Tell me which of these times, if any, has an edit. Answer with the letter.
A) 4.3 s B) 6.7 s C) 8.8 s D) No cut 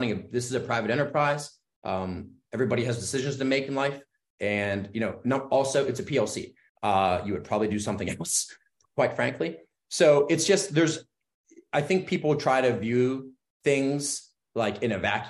B